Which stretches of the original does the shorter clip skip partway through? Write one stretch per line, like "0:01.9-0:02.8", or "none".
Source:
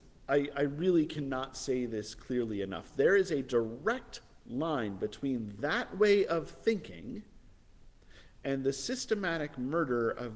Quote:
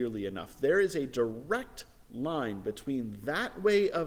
none